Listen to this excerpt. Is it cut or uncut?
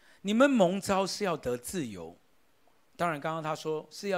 uncut